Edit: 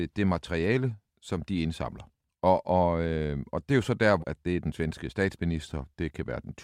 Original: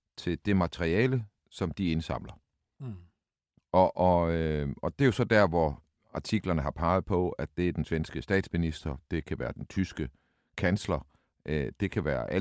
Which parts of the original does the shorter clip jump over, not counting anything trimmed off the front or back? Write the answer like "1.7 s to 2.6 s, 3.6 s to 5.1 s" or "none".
2.6 s to 3.6 s, 5.5 s to 7.3 s